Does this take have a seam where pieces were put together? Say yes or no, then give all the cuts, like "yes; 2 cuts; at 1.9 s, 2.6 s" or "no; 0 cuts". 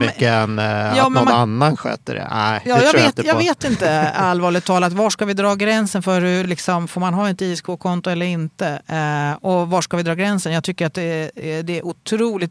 no; 0 cuts